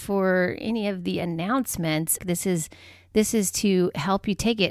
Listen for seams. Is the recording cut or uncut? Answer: cut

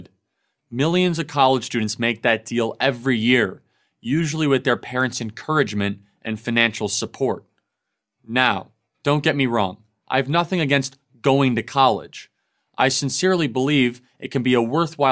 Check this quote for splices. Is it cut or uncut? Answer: uncut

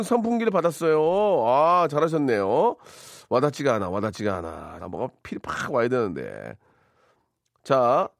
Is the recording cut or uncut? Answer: cut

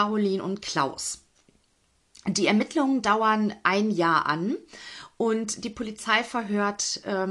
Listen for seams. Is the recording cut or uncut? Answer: cut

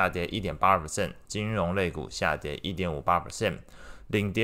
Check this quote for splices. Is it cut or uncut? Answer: cut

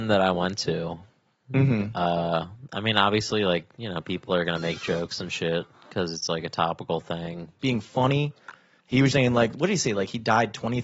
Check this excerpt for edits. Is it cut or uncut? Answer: cut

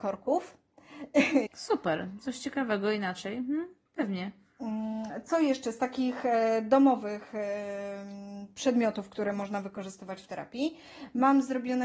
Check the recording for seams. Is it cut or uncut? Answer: cut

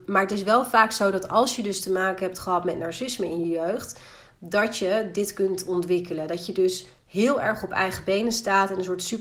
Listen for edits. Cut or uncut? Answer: uncut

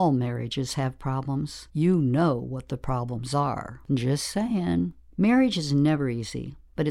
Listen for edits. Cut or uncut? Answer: cut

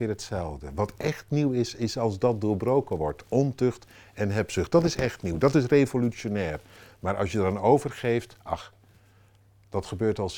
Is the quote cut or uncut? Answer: uncut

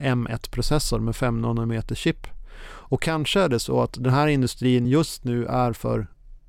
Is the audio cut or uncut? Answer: uncut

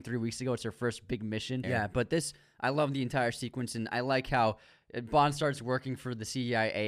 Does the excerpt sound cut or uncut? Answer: cut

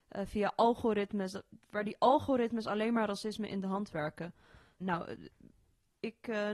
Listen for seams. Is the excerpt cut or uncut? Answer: cut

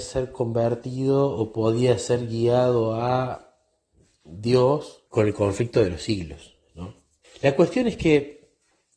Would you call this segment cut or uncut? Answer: cut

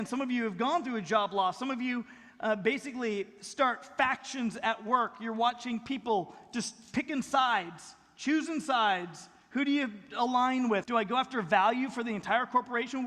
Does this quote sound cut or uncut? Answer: cut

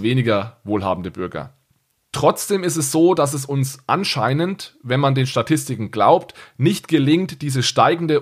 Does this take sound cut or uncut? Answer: uncut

